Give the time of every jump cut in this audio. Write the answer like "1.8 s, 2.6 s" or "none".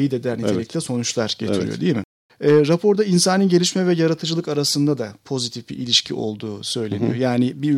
none